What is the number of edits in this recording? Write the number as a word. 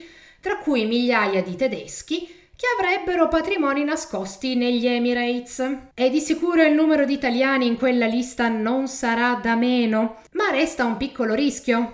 two